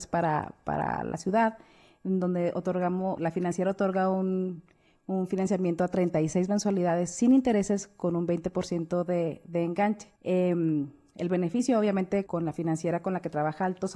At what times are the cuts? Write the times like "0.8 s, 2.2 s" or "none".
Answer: 3.2 s, 10.2 s, 12.3 s